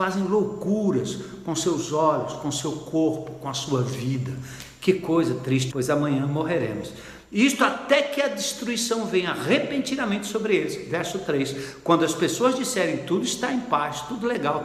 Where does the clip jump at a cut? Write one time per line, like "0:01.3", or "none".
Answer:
0:05.7